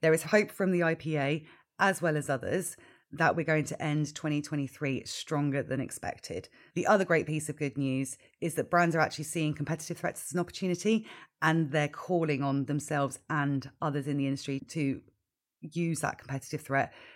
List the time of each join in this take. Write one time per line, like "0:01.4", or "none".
0:06.7